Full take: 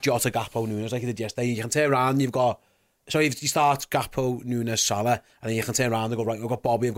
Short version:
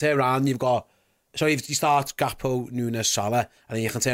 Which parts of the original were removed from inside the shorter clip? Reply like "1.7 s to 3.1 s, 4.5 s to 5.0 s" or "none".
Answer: none